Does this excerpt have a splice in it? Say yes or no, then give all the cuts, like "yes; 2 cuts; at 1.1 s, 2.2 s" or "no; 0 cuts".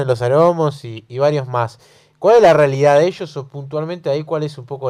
no; 0 cuts